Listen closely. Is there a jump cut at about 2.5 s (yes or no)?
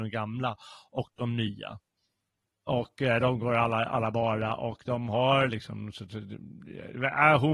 yes